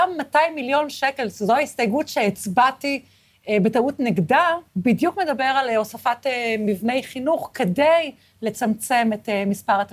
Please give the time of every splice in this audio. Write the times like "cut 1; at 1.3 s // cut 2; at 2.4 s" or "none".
cut 1; at 4.7 s